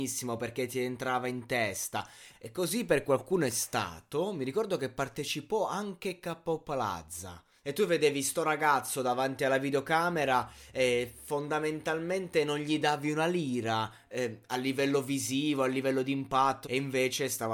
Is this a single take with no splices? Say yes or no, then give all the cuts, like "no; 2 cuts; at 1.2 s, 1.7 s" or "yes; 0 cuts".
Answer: no; 3 cuts; at 2.3 s, 7.6 s, 16.6 s